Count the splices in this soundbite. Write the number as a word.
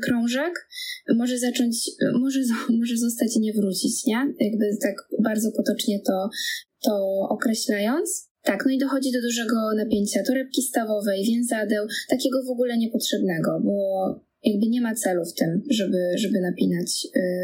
zero